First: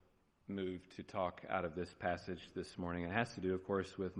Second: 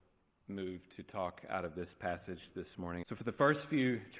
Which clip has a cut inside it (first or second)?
second